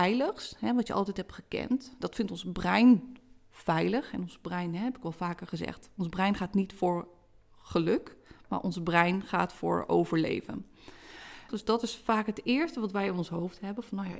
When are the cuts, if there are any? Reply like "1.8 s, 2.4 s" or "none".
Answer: 11.5 s